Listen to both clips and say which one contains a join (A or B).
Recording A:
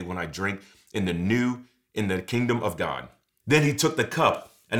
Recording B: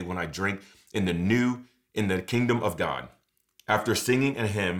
A